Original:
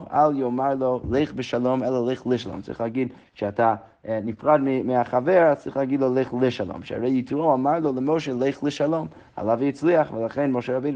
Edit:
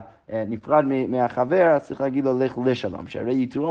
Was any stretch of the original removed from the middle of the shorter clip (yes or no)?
no